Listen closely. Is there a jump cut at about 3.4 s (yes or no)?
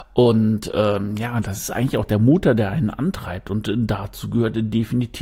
no